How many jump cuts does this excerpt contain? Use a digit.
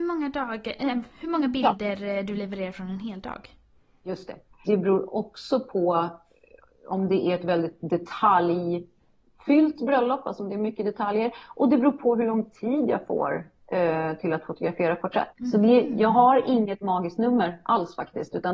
2